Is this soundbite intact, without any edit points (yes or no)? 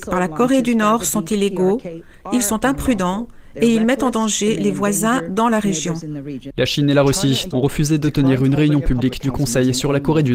no